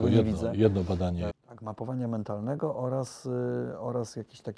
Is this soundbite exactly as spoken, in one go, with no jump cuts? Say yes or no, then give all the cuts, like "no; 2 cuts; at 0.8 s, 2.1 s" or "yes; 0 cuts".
no; 1 cut; at 1.3 s